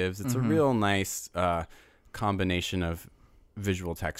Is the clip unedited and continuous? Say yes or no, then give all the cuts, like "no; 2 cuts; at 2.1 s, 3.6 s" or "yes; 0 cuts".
yes; 0 cuts